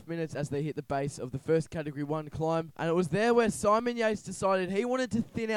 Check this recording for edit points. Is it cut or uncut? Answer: uncut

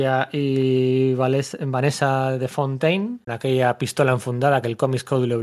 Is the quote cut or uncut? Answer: cut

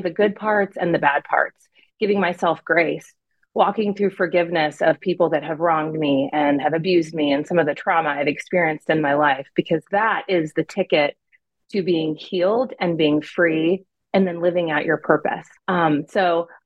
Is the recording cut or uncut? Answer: cut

